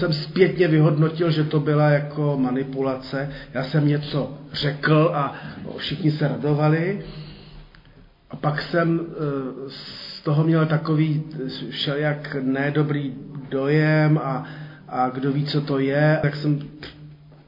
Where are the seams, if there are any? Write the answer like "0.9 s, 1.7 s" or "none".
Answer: 16.2 s